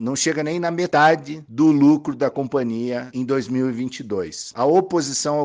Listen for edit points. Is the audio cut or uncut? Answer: cut